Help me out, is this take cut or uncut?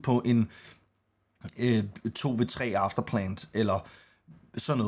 uncut